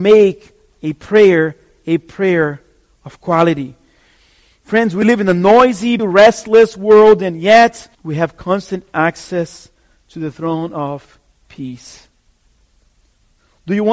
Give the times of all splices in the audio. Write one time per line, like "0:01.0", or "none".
0:06.0
0:07.9